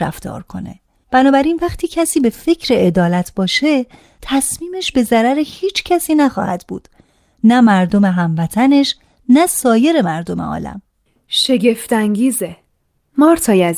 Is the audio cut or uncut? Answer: uncut